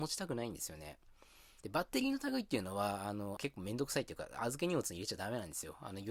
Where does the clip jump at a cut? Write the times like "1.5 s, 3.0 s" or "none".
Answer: 1.6 s, 3.4 s